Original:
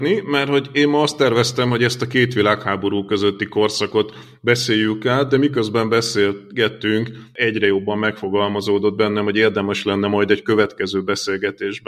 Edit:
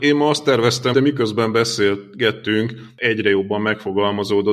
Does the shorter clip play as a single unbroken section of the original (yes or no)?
no